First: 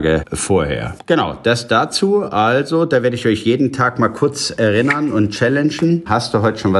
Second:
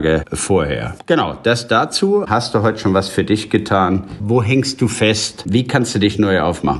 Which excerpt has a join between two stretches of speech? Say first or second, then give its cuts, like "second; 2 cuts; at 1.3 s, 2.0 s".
second; 2 cuts; at 2.2 s, 4.2 s